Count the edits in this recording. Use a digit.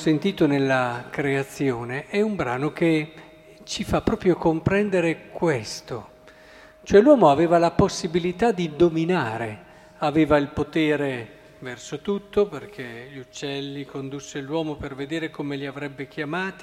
0